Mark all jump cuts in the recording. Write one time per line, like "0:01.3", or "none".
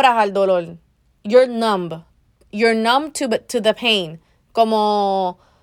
none